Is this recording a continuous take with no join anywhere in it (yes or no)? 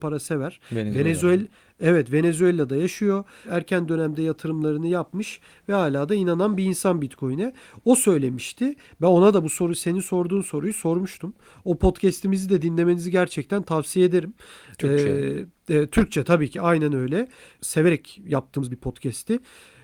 yes